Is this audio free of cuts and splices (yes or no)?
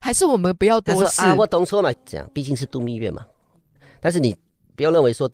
no